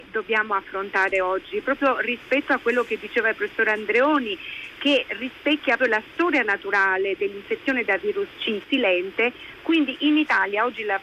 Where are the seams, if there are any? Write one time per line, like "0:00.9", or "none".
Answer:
0:05.8
0:08.6